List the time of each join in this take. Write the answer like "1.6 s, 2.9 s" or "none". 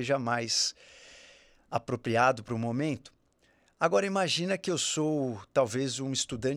none